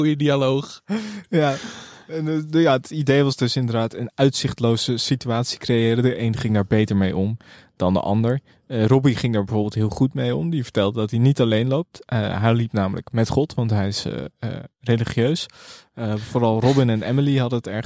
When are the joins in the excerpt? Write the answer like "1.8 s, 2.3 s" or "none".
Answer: none